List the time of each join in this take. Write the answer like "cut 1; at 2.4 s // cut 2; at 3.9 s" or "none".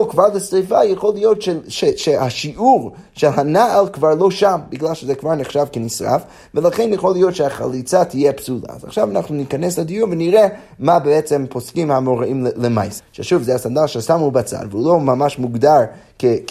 cut 1; at 13.0 s

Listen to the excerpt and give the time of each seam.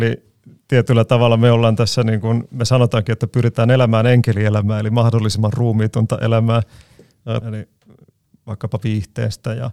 cut 1; at 7.4 s

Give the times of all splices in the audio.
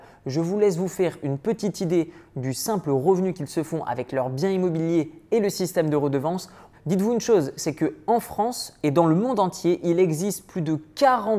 cut 1; at 6.7 s

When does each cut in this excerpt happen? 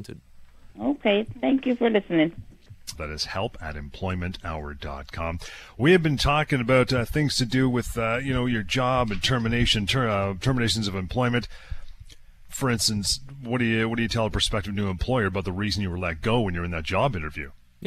cut 1; at 3.0 s // cut 2; at 12.4 s

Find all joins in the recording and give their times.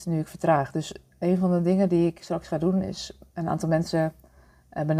none

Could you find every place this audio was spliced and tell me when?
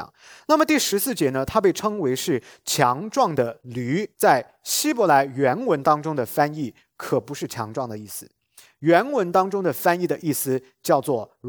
cut 1; at 4.1 s

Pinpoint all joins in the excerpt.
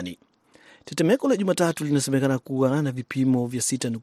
none

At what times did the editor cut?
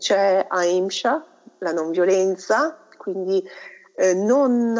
none

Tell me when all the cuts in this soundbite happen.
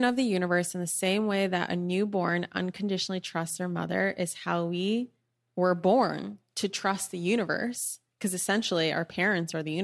none

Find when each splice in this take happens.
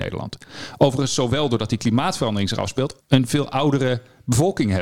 cut 1; at 3.0 s

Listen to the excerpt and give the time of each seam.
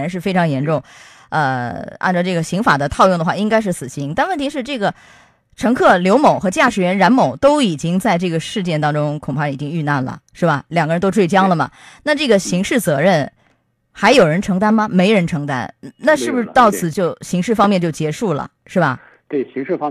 cut 1; at 16.9 s // cut 2; at 18.6 s

